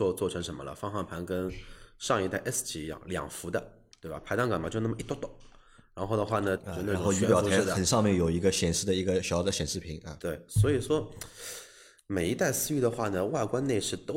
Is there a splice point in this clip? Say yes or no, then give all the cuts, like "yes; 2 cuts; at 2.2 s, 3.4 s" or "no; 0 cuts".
yes; 1 cut; at 6.6 s